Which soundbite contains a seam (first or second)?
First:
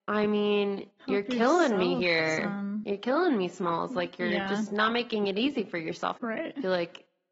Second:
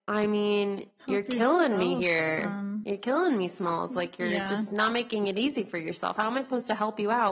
first